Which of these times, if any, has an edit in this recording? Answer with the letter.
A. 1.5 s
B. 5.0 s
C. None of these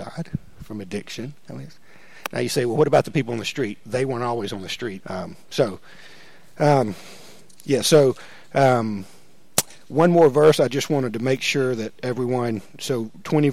B